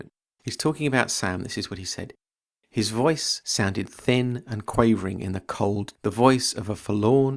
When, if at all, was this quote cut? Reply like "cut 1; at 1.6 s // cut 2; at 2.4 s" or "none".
cut 1; at 5.9 s